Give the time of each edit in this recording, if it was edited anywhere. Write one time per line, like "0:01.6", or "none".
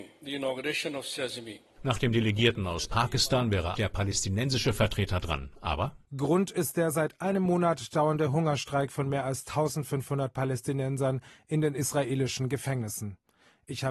0:03.8
0:06.0